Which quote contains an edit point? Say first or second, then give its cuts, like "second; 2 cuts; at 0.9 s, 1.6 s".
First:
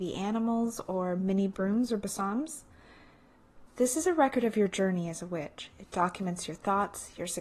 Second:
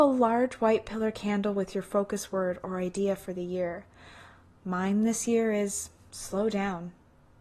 first; 1 cut; at 3.7 s